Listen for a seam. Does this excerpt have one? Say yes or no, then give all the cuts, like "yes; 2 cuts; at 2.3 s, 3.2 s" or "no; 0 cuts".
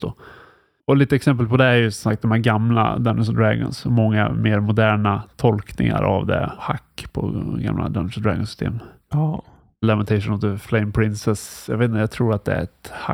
no; 0 cuts